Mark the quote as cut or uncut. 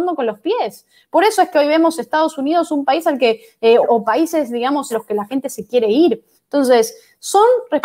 cut